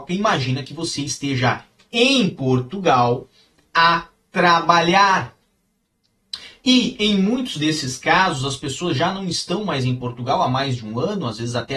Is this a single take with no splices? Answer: yes; 0 cuts

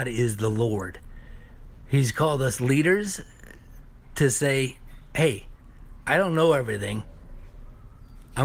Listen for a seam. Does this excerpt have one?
no; 0 cuts

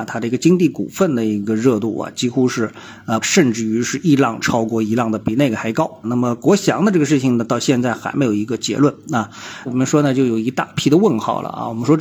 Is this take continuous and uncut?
no; 3 cuts; at 3.2 s, 6.0 s, 9.7 s

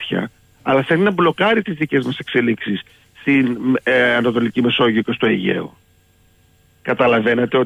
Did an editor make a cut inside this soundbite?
no; 0 cuts

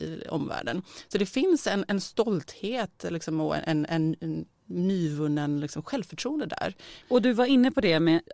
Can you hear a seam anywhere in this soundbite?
yes; 1 cut; at 7.0 s

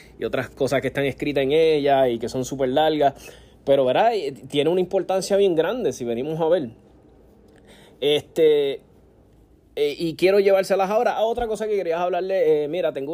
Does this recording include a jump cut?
no; 0 cuts

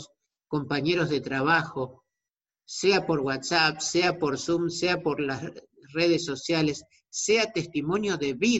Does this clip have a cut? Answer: no; 0 cuts

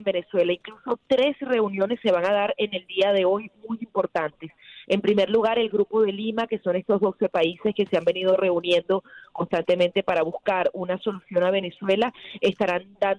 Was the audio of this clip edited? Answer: no; 0 cuts

